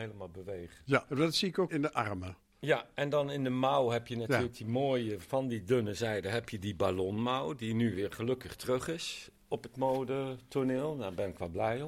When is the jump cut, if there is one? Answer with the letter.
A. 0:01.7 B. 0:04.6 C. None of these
A